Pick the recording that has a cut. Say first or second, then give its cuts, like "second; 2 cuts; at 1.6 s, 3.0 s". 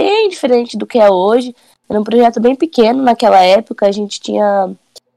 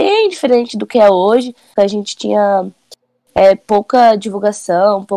second; 1 cut; at 1.8 s